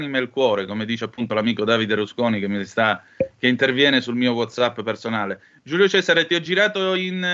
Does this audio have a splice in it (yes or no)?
no